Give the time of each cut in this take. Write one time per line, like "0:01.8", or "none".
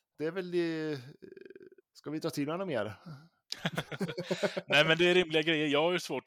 0:01.8